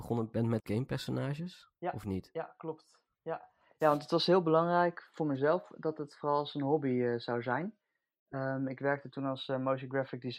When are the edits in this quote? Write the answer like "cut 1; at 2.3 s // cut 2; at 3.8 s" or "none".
none

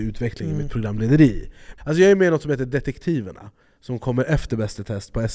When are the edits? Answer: cut 1; at 1.8 s

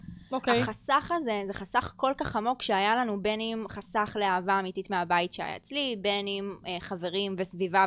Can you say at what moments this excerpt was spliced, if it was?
none

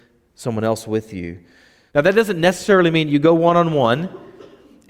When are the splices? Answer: cut 1; at 1.9 s

